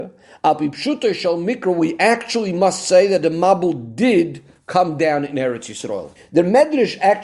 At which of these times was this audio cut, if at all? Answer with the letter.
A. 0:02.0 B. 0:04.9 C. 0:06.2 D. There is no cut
C